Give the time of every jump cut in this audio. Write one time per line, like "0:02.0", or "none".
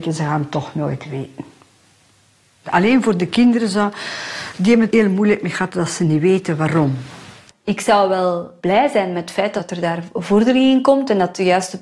0:04.9
0:07.5